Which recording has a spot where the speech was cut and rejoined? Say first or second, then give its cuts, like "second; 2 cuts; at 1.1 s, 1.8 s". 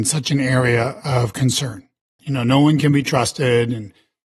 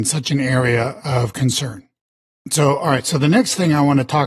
first; 1 cut; at 2.2 s